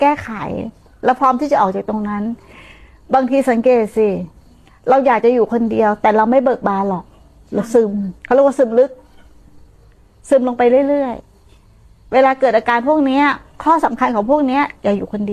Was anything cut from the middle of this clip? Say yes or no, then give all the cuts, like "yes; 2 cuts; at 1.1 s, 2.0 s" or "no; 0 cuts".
yes; 1 cut; at 8.2 s